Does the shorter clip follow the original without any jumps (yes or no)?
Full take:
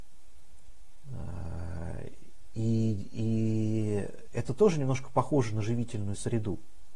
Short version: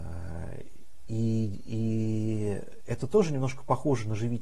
yes